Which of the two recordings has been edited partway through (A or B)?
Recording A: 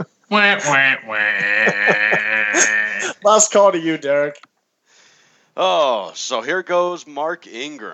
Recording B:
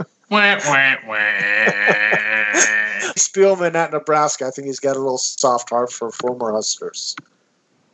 B